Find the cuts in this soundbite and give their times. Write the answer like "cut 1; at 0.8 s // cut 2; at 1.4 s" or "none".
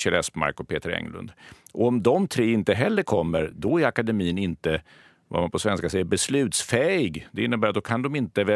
none

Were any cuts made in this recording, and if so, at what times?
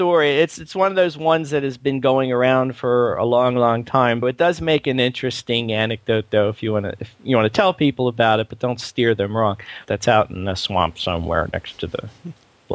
cut 1; at 4.2 s // cut 2; at 9.9 s

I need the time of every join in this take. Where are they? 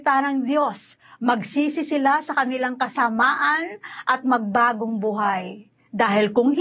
none

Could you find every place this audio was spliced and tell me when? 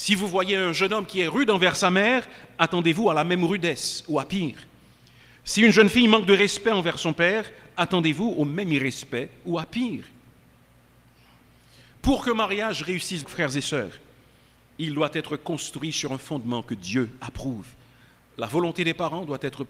cut 1; at 13.2 s

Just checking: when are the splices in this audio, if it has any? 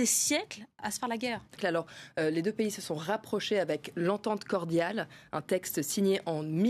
cut 1; at 1.6 s

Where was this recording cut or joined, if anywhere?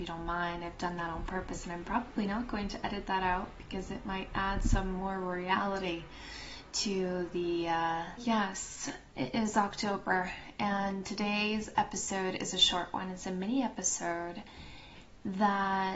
cut 1; at 8.2 s

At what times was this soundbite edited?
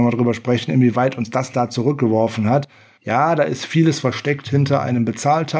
cut 1; at 3.0 s

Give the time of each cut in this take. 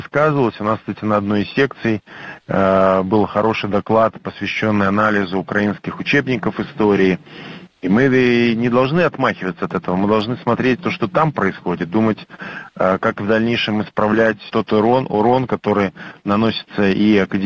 cut 1; at 14.5 s

